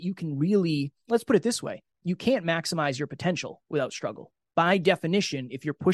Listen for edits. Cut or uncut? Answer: uncut